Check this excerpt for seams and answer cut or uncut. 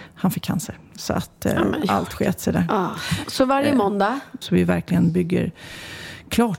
cut